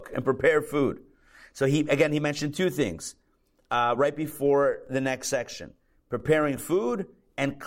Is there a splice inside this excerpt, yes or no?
no